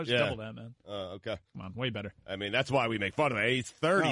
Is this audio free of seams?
yes; 0 cuts

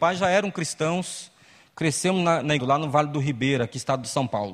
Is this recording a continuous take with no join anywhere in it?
no; 1 cut; at 2.6 s

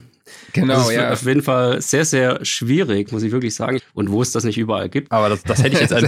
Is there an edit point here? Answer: yes; 2 cuts; at 3.8 s, 5.1 s

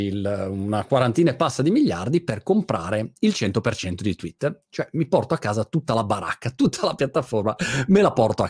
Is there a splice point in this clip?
no; 0 cuts

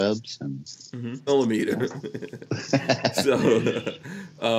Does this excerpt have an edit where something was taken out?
yes; 1 cut; at 1.3 s

